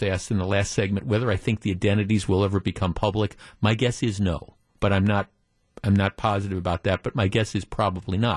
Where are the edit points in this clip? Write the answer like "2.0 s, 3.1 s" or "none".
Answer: none